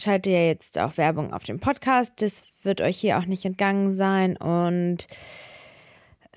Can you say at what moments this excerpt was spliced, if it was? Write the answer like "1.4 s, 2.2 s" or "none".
none